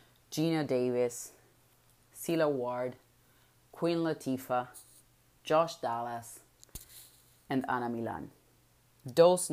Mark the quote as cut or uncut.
uncut